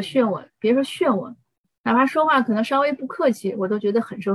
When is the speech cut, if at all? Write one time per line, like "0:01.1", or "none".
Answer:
none